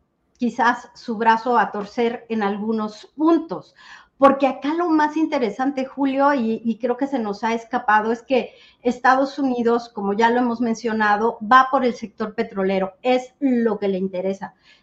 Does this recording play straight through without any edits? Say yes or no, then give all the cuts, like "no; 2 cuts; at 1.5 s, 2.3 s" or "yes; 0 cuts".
yes; 0 cuts